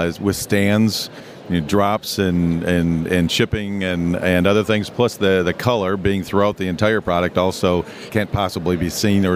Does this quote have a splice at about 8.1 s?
yes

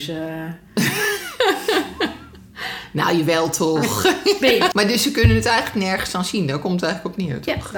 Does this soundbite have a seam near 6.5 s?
no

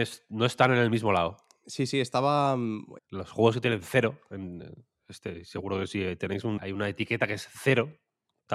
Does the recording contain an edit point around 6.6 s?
yes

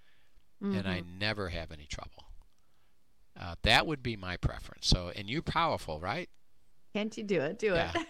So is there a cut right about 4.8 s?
no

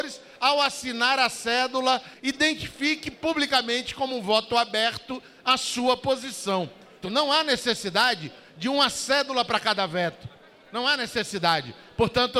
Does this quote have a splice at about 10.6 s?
no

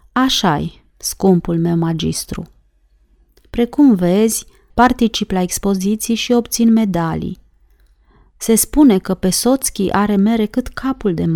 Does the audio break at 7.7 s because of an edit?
no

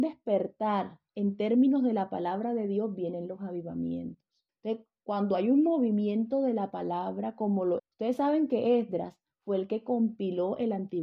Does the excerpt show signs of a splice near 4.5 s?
yes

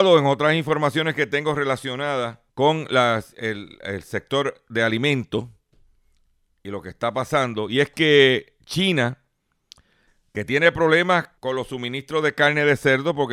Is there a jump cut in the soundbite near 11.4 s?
yes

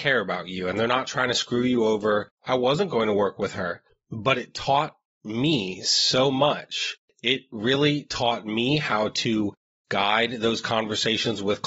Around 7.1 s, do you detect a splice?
no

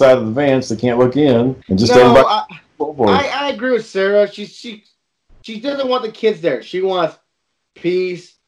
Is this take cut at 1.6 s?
yes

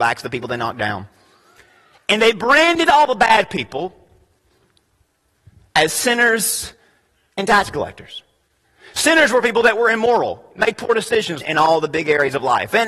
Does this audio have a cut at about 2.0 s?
no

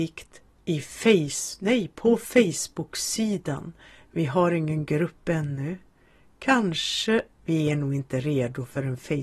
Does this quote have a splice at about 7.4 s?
yes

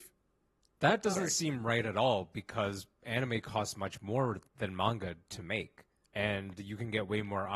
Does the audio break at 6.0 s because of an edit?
yes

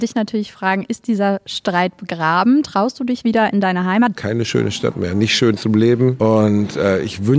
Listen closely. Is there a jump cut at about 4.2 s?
yes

